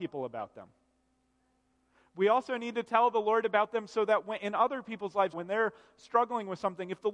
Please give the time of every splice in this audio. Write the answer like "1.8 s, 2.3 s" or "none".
5.3 s